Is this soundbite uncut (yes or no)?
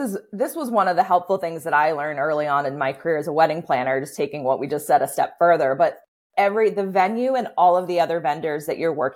yes